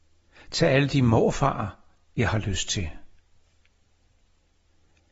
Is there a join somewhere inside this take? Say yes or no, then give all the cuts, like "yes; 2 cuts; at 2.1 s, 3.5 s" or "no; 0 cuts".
no; 0 cuts